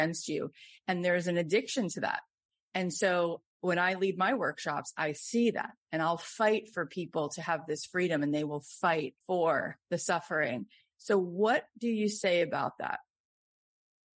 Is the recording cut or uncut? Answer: cut